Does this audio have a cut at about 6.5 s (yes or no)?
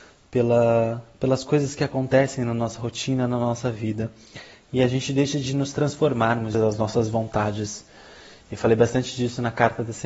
yes